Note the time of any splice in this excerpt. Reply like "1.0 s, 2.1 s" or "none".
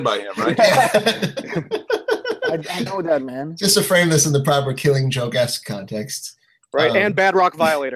2.9 s